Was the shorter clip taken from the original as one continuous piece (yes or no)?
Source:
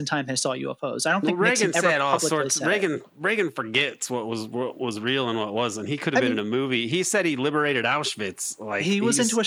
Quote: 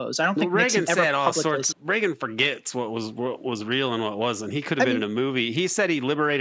no